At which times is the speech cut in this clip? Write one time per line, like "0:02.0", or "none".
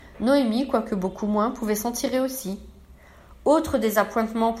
none